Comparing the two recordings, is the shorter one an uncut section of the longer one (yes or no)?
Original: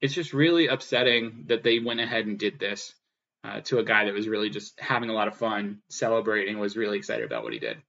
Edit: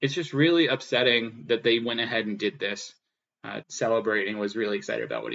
no